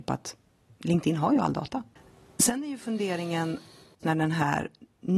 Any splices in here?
yes; 1 cut; at 4.0 s

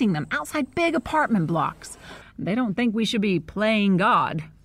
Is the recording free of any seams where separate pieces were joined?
no; 1 cut; at 2.2 s

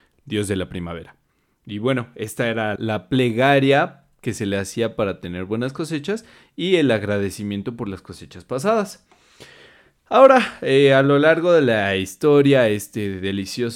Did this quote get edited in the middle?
yes; 1 cut; at 2.8 s

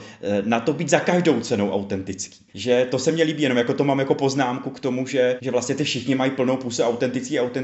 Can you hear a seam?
yes; 2 cuts; at 2.5 s, 5.4 s

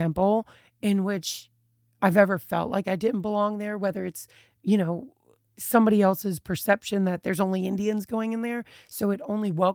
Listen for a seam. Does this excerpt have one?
no; 0 cuts

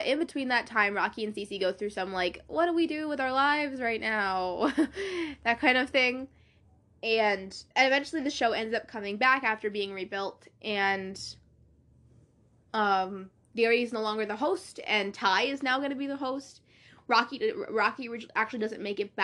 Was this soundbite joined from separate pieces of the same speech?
yes; 1 cut; at 7.7 s

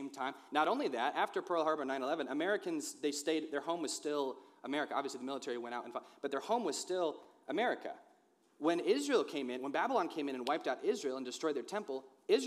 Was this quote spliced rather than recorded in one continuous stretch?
no; 0 cuts

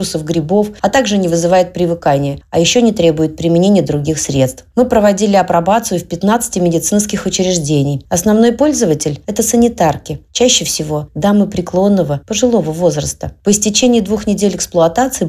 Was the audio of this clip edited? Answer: no; 0 cuts

